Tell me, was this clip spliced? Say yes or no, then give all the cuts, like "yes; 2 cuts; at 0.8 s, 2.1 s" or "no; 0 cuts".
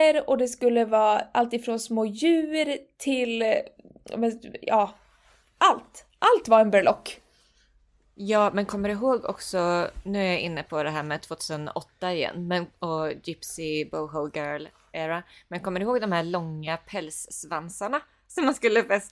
no; 0 cuts